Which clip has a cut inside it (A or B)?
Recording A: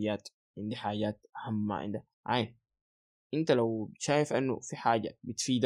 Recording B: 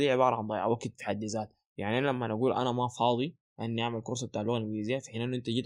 A